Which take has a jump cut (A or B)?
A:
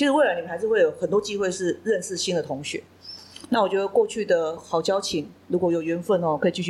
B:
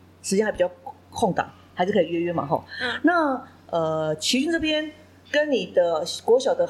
A